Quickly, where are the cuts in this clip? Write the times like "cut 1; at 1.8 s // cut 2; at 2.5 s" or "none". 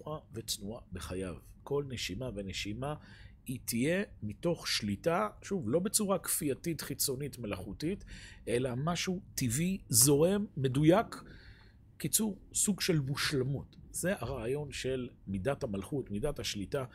none